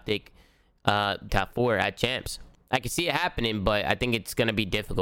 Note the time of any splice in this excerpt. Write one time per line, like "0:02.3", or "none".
0:01.3